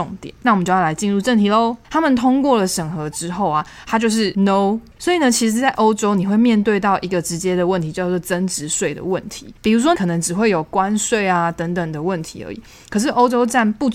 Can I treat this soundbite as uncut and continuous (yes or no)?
no